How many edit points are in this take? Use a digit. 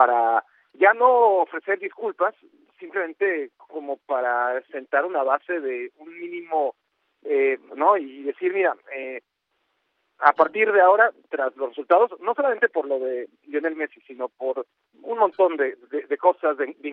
2